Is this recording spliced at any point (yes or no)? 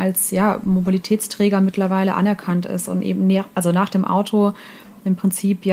no